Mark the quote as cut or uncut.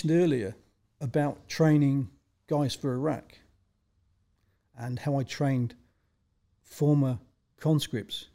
uncut